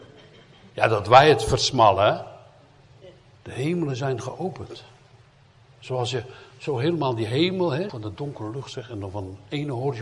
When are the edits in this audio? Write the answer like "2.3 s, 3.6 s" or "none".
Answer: 3.4 s, 7.9 s